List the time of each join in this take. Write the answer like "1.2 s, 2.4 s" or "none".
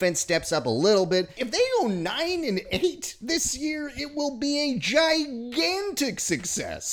1.4 s